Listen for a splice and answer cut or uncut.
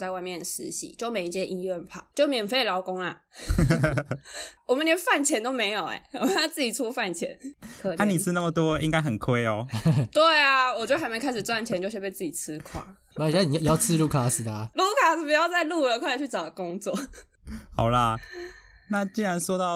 cut